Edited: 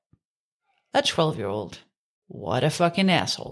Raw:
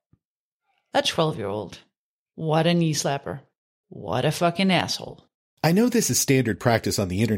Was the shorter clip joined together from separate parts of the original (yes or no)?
yes